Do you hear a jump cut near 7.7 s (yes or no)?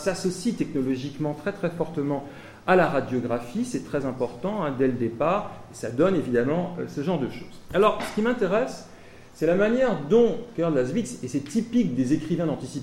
no